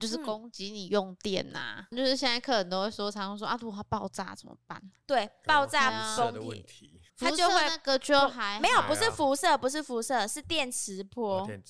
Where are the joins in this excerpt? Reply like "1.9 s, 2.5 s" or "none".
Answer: 7.1 s